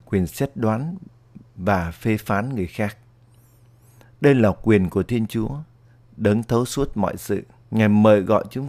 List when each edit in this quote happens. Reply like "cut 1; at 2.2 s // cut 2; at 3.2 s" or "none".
cut 1; at 7.7 s